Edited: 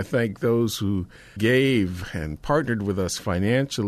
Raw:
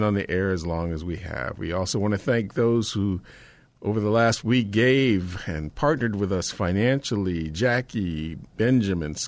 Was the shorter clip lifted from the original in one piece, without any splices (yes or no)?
no